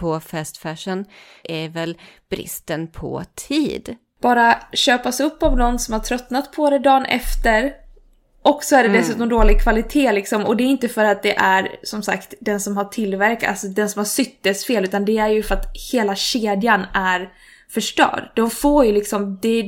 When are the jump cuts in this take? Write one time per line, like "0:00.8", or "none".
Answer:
0:04.1